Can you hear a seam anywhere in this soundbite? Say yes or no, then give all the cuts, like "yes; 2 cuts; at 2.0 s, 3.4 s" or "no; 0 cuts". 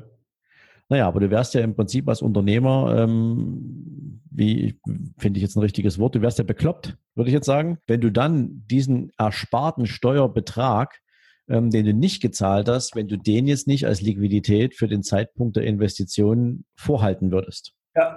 yes; 2 cuts; at 7.8 s, 16.7 s